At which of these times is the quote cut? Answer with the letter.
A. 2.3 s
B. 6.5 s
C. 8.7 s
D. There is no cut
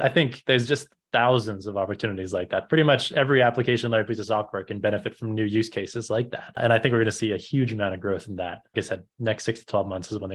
C